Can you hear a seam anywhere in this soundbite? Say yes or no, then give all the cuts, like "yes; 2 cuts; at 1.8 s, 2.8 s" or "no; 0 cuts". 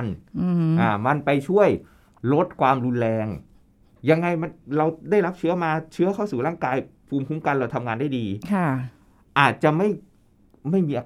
no; 0 cuts